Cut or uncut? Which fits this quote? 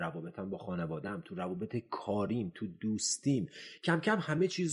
uncut